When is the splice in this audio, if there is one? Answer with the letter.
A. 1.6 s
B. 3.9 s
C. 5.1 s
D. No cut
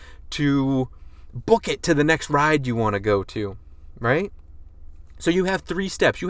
D